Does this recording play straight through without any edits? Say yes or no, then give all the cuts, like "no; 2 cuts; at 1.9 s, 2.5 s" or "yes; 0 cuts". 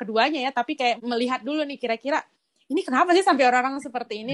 no; 1 cut; at 1.0 s